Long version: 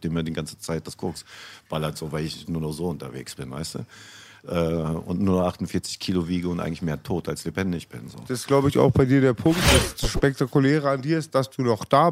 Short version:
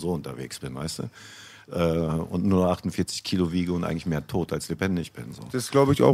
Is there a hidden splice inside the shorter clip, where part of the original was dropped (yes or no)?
no